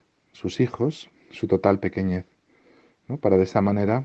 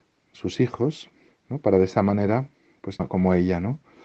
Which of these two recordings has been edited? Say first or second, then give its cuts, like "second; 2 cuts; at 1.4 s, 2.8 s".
second; 2 cuts; at 1.3 s, 3.0 s